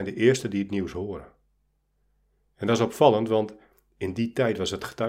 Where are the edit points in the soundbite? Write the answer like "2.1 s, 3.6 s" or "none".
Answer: none